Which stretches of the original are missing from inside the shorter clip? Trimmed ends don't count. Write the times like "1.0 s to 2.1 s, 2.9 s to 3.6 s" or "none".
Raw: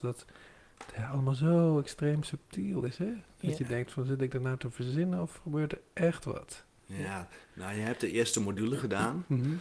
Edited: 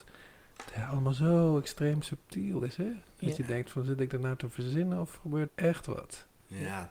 5.7 s to 5.9 s